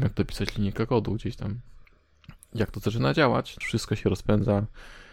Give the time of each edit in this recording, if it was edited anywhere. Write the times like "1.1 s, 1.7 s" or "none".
3.6 s